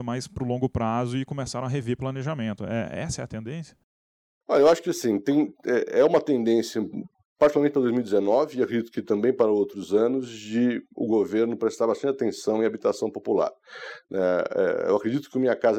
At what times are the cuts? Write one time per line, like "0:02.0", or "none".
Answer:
none